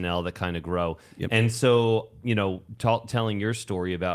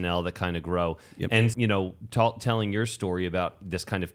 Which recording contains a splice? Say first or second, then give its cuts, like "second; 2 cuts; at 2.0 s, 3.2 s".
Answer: second; 1 cut; at 1.5 s